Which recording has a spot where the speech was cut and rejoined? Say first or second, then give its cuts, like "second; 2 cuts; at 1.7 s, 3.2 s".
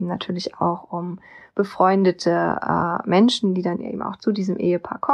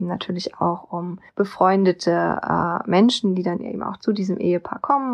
second; 1 cut; at 1.3 s